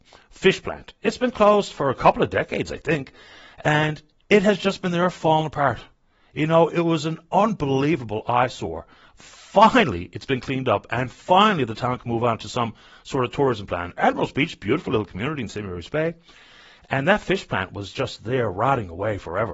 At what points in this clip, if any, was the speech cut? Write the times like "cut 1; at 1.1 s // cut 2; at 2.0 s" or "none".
none